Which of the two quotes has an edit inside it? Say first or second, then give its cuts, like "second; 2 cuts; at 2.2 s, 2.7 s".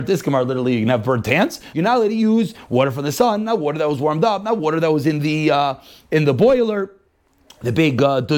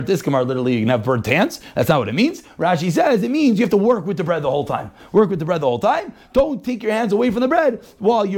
first; 1 cut; at 1.7 s